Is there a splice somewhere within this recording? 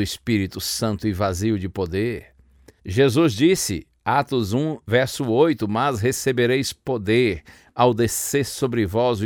yes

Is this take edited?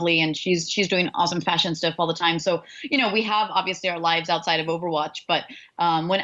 no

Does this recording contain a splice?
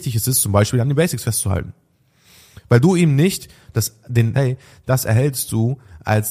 yes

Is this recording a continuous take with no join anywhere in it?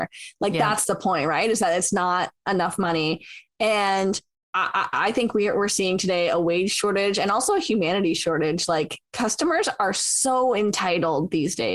no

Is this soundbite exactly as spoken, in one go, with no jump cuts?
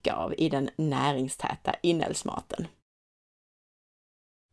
yes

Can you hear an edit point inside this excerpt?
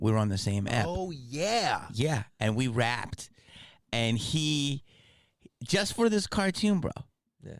no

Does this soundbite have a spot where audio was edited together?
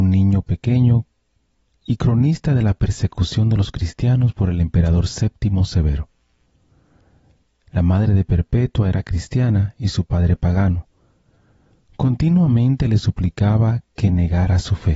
no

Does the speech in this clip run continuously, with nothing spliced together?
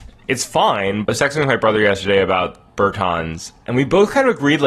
no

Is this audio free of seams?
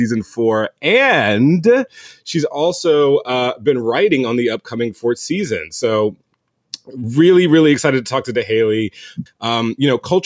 no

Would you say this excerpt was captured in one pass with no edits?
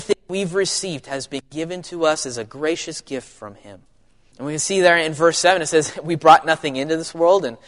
no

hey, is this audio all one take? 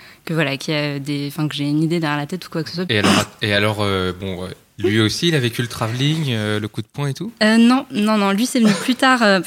no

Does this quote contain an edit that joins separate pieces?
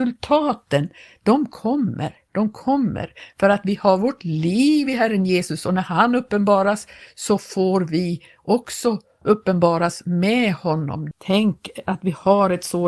yes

